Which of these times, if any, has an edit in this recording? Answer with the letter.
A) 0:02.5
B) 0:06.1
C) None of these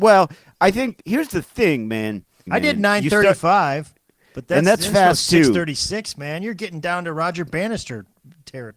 A